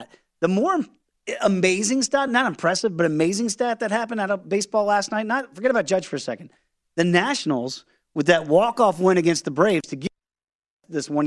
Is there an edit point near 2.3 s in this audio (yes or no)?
no